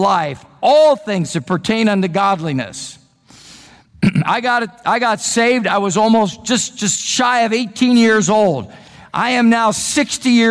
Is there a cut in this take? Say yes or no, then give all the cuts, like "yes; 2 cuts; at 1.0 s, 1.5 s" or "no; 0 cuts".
no; 0 cuts